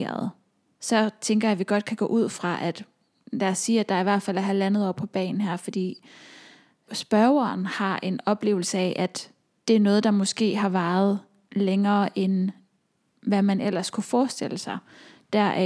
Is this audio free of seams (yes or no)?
yes